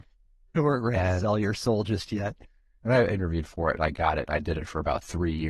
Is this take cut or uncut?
cut